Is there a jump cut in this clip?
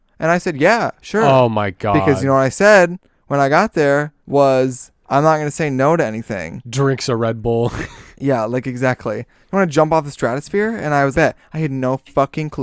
yes; 2 cuts; at 4.2 s, 11.1 s

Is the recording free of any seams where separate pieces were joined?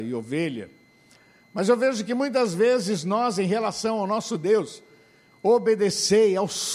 yes; 0 cuts

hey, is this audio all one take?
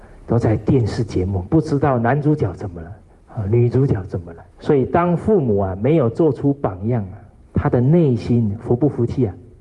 no; 2 cuts; at 4.5 s, 7.5 s

